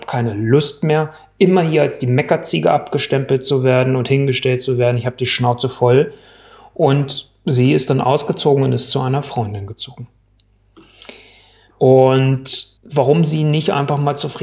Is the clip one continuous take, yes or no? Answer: no